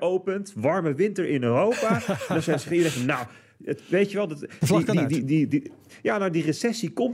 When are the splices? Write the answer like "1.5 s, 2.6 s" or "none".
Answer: none